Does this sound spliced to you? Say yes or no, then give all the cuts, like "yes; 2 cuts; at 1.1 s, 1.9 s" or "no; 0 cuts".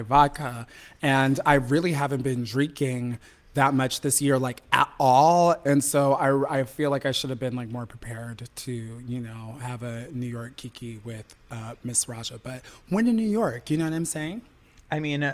no; 0 cuts